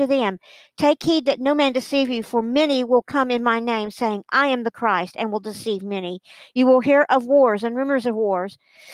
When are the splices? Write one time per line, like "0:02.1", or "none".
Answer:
none